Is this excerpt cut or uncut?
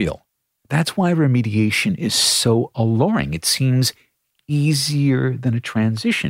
uncut